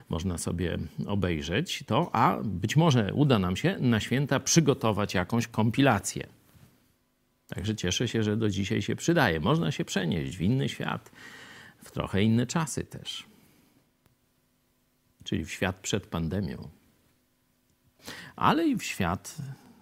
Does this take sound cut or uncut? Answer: uncut